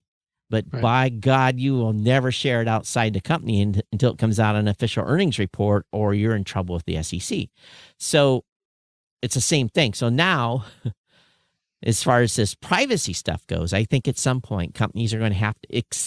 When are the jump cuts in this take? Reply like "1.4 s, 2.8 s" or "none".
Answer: none